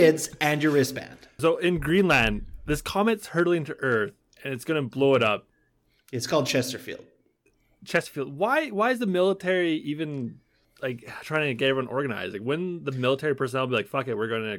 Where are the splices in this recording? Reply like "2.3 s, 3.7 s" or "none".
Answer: 1.4 s

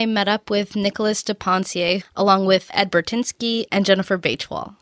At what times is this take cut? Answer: 2.0 s

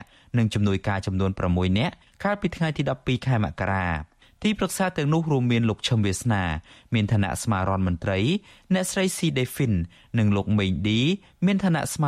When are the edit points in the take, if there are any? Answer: none

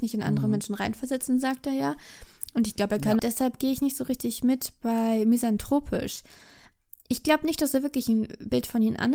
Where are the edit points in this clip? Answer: 3.2 s

